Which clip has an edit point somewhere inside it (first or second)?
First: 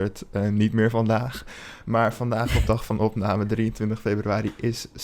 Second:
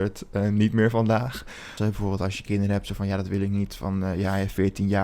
second